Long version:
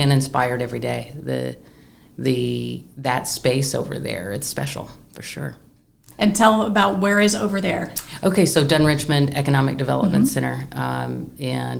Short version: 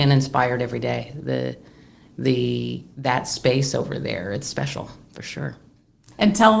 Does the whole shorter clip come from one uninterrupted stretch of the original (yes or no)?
yes